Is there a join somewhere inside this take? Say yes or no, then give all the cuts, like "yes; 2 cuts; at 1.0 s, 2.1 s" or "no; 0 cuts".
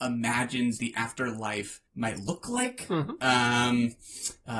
yes; 1 cut; at 1.9 s